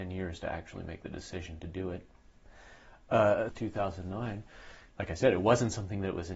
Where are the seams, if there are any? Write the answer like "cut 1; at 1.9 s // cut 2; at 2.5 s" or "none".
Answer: cut 1; at 3.5 s // cut 2; at 4.9 s